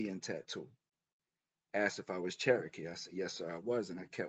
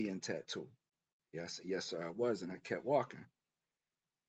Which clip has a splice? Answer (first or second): second